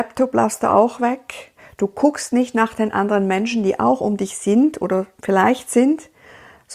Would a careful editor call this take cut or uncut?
uncut